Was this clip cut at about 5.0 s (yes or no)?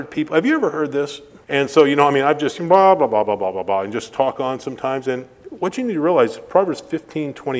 no